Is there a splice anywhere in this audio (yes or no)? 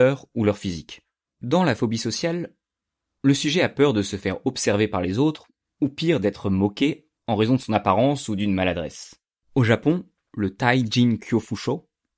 yes